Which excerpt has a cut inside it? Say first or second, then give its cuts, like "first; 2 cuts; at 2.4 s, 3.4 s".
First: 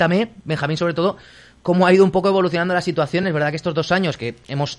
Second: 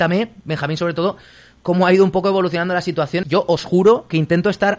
second; 1 cut; at 3.2 s